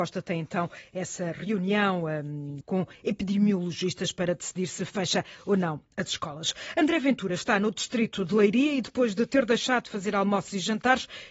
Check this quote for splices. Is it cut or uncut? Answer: cut